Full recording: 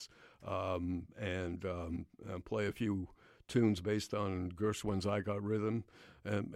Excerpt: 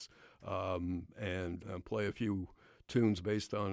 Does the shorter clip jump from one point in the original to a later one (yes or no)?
yes